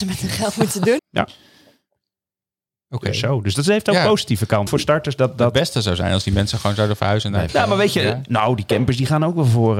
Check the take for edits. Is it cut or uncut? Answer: cut